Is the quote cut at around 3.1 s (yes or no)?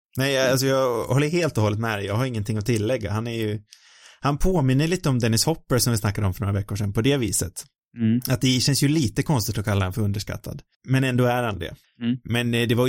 no